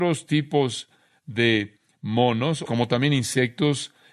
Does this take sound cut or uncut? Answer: cut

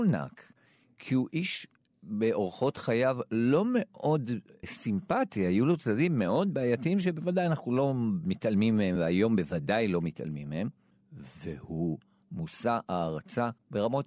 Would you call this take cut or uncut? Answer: uncut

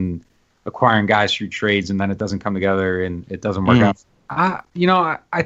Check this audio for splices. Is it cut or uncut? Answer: cut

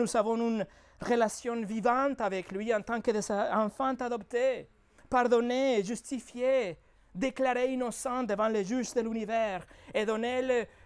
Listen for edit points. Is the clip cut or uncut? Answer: uncut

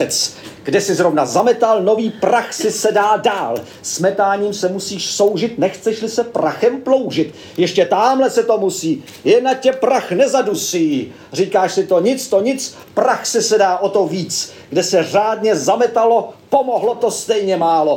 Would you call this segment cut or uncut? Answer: uncut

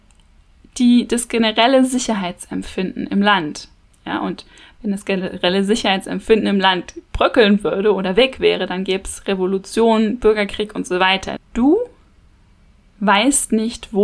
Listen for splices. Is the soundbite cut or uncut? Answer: cut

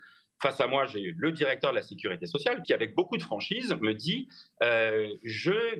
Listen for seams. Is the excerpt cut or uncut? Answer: cut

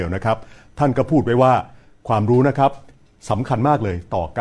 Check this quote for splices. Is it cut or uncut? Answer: uncut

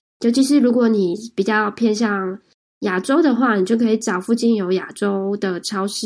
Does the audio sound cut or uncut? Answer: uncut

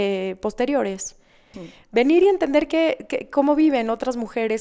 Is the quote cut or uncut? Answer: cut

